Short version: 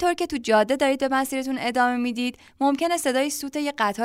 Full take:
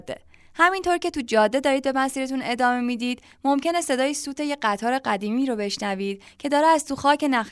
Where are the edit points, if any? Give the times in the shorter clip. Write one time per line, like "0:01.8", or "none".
none